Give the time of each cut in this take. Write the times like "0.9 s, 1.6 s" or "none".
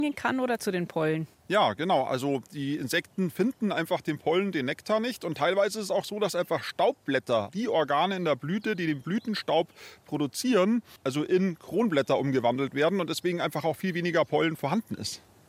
7.5 s, 11.0 s